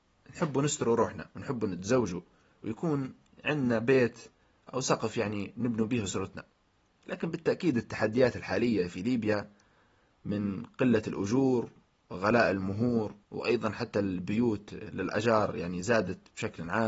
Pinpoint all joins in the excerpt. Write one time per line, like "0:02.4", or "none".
0:01.3
0:13.2